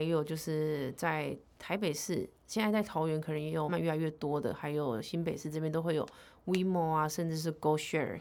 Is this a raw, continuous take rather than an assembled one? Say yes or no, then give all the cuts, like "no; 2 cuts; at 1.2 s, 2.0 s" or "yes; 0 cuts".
no; 1 cut; at 3.7 s